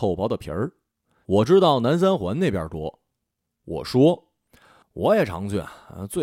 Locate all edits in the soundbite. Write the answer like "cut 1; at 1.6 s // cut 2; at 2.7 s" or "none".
none